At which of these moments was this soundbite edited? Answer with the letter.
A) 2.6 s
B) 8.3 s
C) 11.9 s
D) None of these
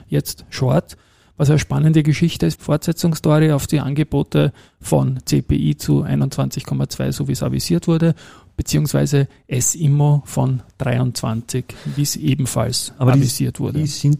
A